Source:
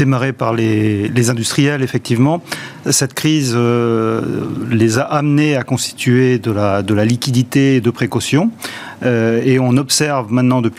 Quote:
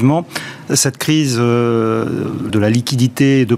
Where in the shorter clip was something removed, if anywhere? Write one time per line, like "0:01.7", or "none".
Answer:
0:02.5